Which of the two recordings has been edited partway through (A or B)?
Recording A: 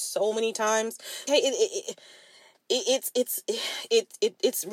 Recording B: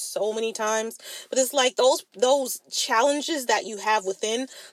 A